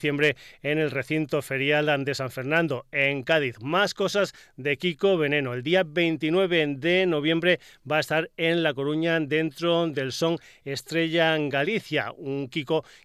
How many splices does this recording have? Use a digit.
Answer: 0